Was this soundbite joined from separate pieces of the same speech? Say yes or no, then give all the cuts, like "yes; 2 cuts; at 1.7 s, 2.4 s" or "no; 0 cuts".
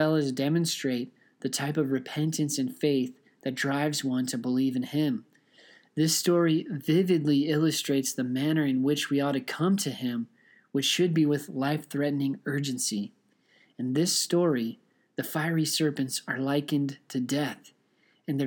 no; 0 cuts